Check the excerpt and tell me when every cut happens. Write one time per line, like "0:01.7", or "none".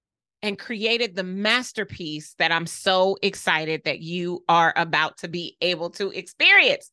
none